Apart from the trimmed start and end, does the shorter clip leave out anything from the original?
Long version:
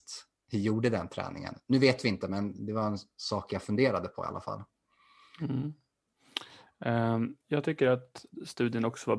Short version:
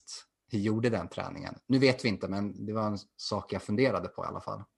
no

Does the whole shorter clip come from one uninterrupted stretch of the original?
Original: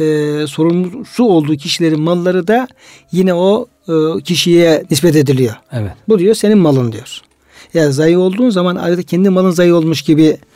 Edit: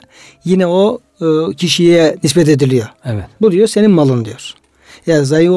yes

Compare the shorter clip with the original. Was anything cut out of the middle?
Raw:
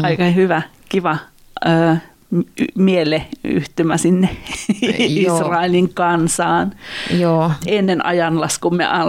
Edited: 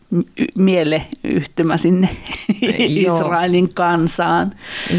no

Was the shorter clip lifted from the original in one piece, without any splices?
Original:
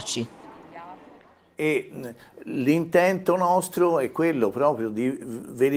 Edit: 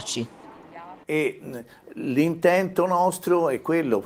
no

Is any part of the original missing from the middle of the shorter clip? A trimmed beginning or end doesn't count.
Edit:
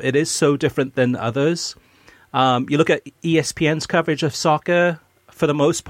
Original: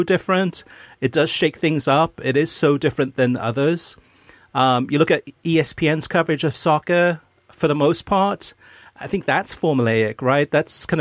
no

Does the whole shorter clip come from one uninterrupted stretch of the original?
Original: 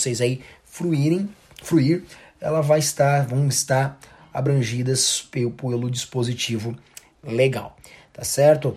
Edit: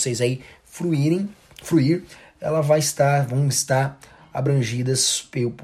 yes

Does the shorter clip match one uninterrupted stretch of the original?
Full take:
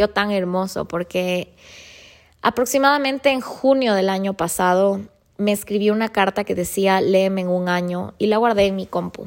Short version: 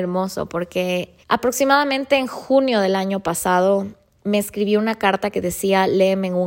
no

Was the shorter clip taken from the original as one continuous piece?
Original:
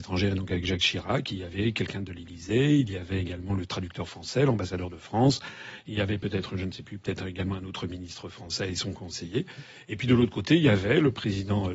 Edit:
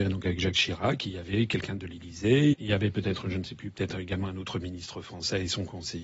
no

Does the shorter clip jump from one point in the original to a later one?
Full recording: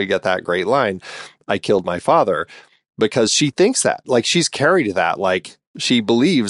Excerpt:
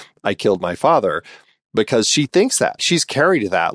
yes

